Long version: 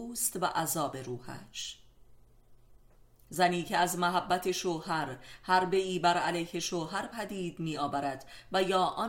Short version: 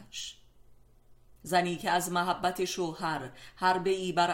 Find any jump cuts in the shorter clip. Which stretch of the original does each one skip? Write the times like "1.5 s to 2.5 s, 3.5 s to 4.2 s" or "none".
2.8 s to 3.2 s